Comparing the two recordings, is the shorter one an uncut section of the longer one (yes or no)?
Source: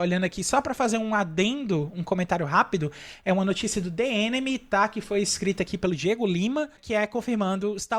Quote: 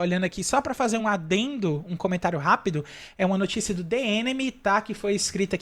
no